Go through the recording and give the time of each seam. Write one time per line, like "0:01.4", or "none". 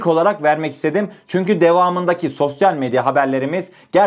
none